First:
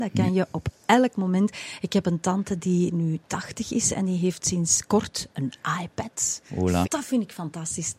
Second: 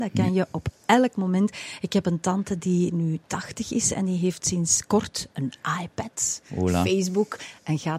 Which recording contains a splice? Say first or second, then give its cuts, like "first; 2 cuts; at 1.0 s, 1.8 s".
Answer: first; 1 cut; at 6.8 s